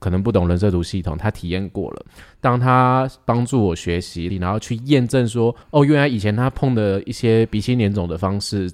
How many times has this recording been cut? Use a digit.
2